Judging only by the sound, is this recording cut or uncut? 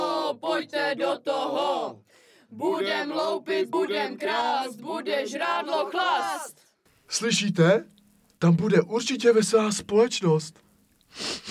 uncut